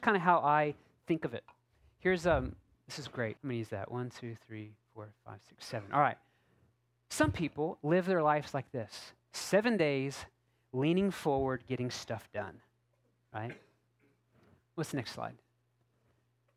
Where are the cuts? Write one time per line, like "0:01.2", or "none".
0:03.4